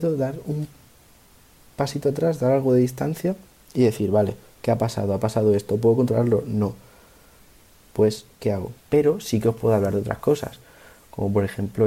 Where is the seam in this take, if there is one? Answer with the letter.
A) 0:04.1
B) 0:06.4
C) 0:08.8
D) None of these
C